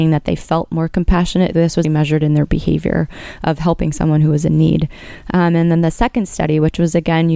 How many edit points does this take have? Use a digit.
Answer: 1